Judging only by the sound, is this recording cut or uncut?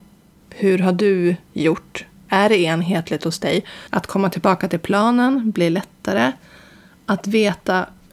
cut